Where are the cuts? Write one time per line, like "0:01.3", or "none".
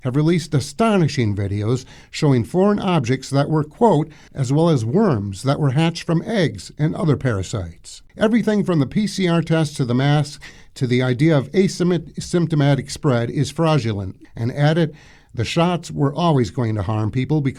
0:04.3
0:08.1
0:14.2